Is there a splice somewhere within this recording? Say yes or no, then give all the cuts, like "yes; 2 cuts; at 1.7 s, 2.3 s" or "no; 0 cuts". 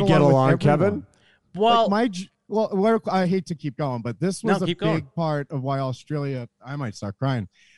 no; 0 cuts